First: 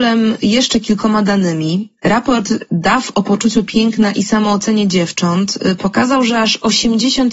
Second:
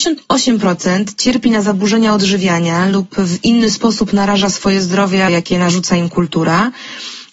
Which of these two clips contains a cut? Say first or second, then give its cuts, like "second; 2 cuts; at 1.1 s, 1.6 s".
second; 1 cut; at 5.3 s